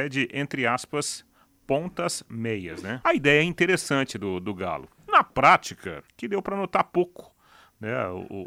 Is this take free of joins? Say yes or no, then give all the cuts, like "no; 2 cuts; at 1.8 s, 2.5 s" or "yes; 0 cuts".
no; 2 cuts; at 3.0 s, 6.1 s